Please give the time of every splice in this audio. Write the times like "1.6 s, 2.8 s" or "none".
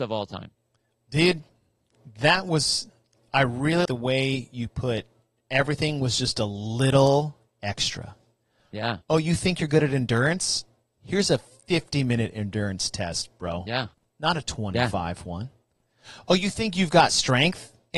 3.9 s